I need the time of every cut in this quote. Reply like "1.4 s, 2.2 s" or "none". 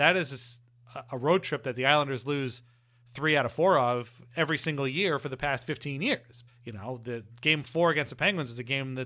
6.5 s

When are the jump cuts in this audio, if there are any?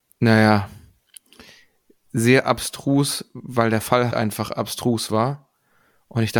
4.1 s

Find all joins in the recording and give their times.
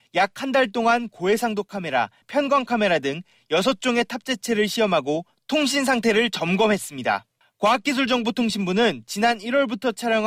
2.2 s, 7.4 s

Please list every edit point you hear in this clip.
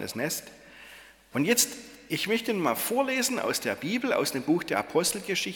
1.3 s

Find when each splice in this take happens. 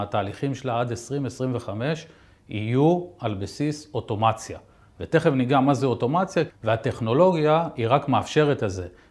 6.5 s

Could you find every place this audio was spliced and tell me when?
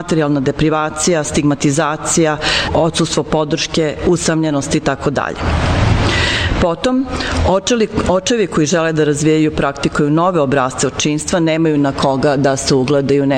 2.7 s

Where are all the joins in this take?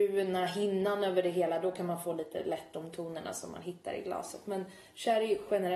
none

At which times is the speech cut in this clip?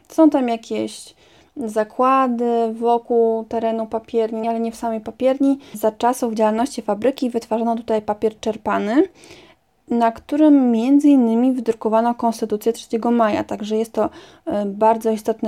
4.4 s, 5.7 s

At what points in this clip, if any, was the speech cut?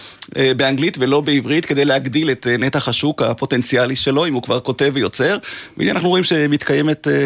none

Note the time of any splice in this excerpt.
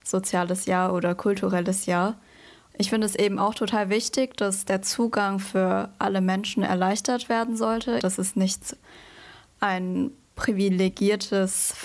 2.7 s, 8.0 s

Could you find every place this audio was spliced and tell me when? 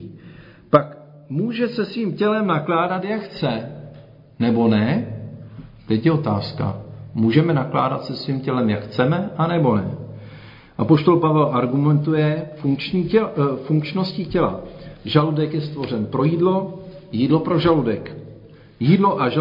none

